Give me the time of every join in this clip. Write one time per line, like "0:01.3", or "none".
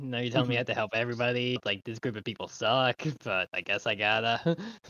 0:01.6